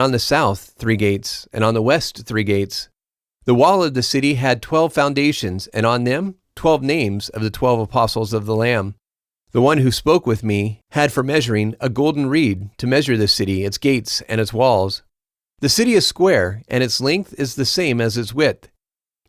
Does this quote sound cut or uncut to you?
uncut